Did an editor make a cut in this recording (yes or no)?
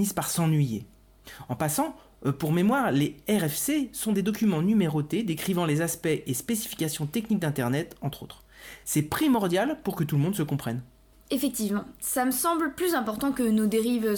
no